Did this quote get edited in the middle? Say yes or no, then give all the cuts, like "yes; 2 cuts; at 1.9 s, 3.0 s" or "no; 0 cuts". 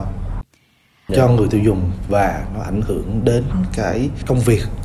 yes; 1 cut; at 1.1 s